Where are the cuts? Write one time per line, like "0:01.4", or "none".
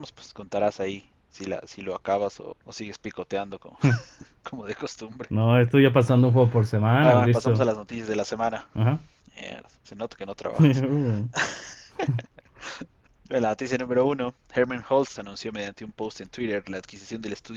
0:15.2